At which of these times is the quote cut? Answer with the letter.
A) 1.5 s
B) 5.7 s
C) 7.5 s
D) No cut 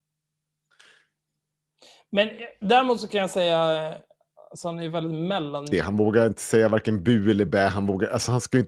B